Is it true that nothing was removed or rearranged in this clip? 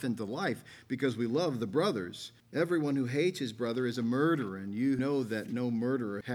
no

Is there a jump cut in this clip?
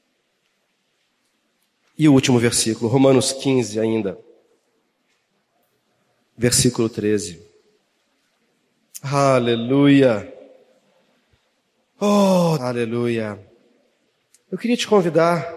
yes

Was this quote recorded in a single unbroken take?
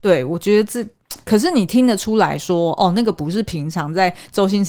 no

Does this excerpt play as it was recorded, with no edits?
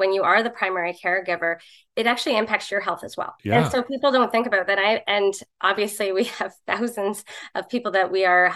no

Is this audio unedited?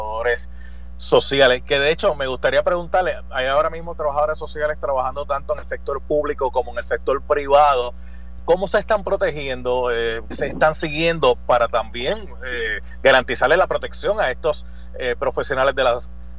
no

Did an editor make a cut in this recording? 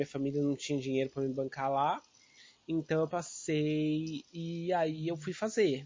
yes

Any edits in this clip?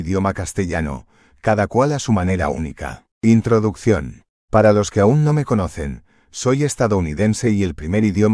yes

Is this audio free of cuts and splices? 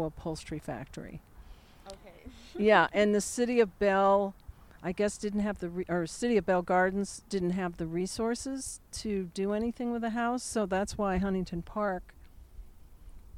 yes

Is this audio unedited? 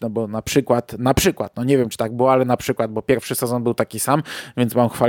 yes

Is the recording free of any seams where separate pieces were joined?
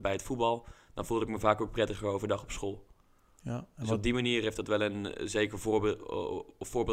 yes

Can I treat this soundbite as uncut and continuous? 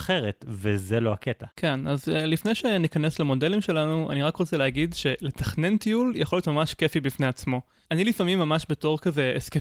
no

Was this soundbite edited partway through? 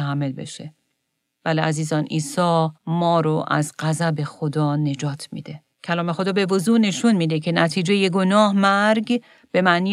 yes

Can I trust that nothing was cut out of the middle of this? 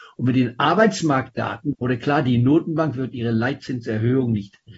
no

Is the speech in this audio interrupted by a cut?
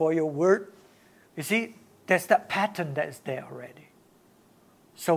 yes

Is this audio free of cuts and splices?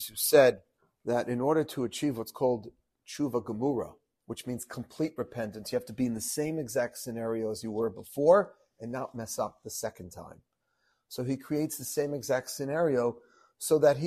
yes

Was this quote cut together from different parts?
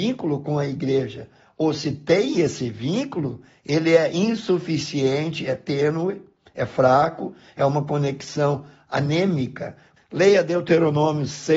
yes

